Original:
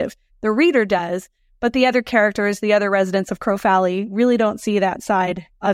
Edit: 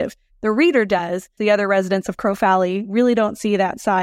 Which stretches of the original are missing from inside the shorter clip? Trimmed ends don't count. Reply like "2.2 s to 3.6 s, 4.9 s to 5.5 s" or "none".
1.4 s to 2.6 s